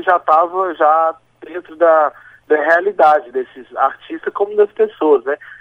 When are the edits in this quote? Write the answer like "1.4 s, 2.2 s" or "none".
3.3 s